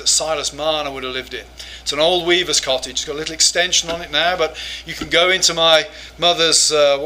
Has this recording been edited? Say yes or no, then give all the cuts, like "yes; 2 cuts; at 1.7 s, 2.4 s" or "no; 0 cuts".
no; 0 cuts